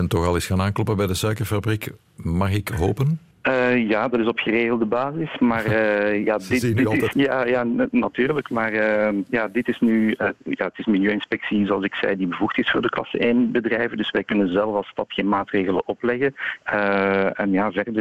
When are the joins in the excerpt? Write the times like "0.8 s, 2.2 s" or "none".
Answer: 3.3 s, 7.1 s, 16.6 s